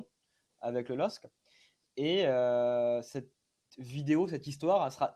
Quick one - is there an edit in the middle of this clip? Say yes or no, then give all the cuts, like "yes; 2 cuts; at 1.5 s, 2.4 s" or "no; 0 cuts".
no; 0 cuts